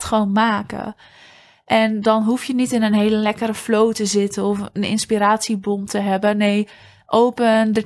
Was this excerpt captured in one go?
yes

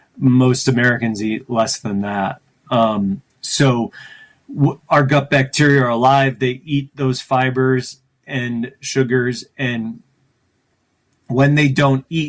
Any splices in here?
no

